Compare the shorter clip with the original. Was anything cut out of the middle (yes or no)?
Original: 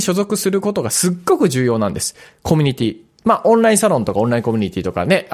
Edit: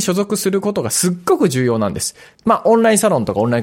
yes